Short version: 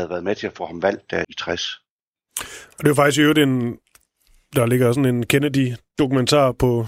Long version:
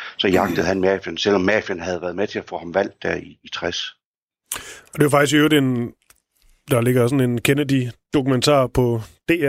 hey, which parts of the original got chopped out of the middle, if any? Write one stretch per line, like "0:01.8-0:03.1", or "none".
0:03.2-0:03.4